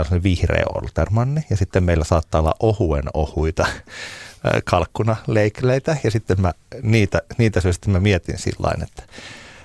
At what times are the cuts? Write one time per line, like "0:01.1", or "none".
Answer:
none

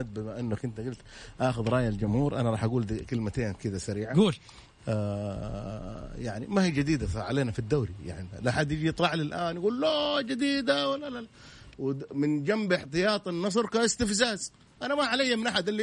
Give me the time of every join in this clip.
0:11.7

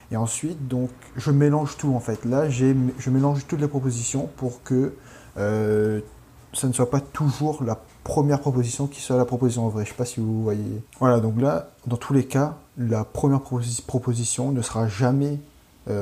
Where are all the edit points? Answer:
0:10.9

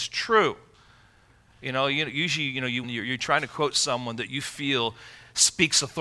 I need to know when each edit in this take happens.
0:01.5
0:02.8

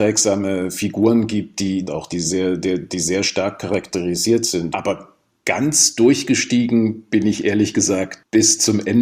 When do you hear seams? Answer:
0:01.9
0:04.7

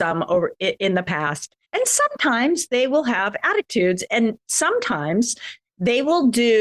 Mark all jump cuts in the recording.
0:01.6

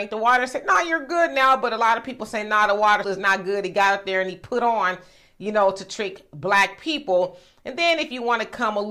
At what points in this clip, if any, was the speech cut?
0:03.0

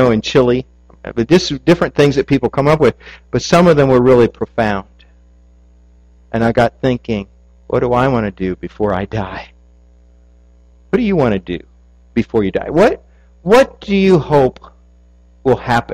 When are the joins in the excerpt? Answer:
none

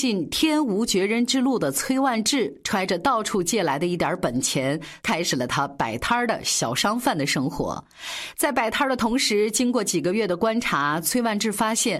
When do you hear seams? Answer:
0:05.0

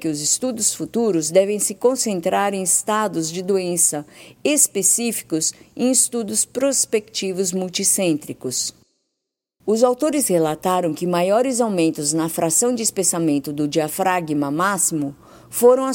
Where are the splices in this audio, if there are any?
0:09.6

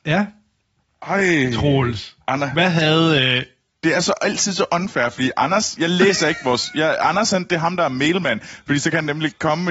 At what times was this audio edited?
none

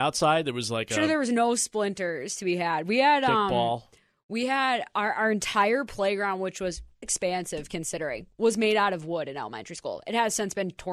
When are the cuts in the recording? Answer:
0:07.0

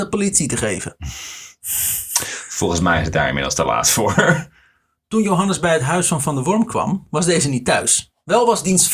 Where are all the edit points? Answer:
none

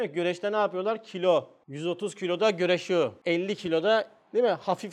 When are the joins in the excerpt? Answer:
none

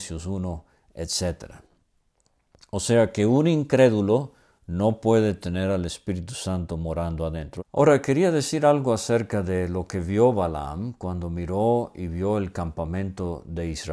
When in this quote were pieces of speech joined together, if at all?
0:07.6

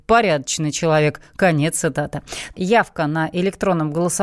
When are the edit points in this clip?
0:02.5

